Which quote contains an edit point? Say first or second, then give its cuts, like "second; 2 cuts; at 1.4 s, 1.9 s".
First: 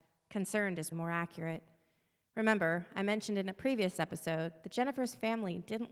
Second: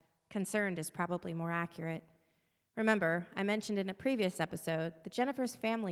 first; 1 cut; at 0.9 s